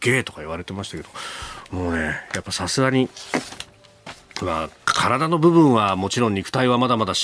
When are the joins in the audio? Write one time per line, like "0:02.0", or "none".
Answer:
none